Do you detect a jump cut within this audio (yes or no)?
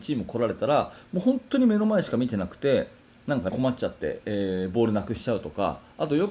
yes